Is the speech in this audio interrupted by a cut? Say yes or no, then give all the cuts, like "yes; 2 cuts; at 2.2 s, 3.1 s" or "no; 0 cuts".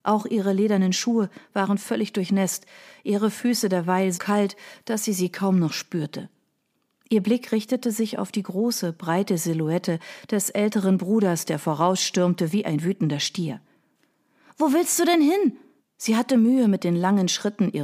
yes; 2 cuts; at 4.1 s, 15.8 s